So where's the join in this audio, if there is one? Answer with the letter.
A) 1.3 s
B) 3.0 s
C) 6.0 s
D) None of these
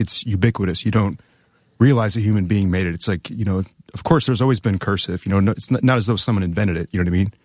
D